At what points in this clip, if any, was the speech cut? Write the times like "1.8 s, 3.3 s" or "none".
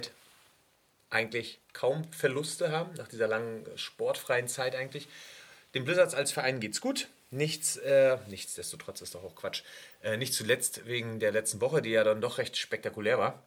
1.6 s